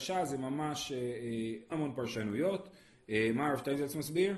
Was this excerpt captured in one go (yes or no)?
no